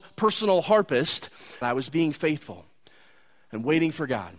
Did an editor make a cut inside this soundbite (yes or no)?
yes